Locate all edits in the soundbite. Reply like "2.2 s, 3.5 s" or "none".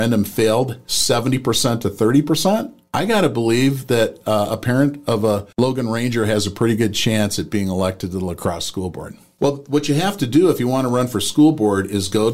5.5 s, 9.4 s